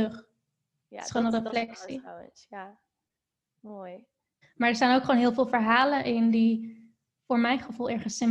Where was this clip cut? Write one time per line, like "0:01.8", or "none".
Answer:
0:04.4